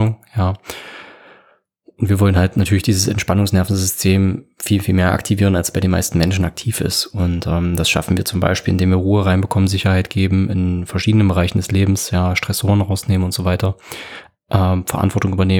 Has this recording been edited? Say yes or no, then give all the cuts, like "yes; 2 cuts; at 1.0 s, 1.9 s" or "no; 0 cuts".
no; 0 cuts